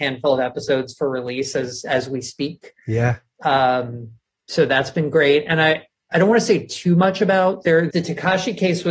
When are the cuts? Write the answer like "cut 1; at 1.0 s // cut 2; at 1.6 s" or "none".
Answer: cut 1; at 7.9 s